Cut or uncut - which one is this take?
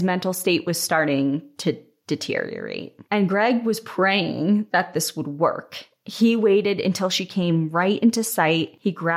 cut